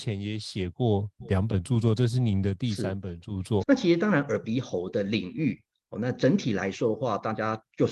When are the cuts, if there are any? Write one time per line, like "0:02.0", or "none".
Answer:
0:03.6